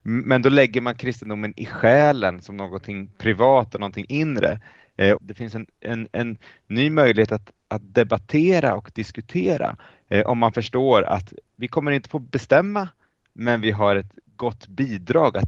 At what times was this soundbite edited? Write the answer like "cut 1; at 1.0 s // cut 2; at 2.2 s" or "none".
cut 1; at 5.2 s